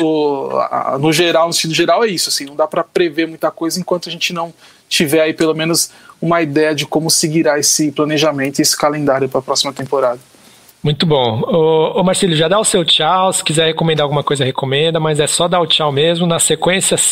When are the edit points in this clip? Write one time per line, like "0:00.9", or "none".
none